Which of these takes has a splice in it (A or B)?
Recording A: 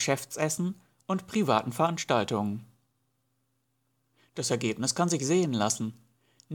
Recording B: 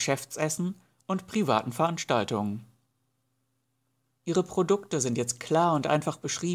B